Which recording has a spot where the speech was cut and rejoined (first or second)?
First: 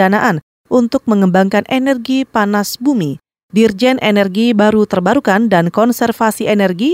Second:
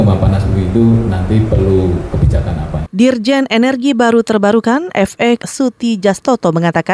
second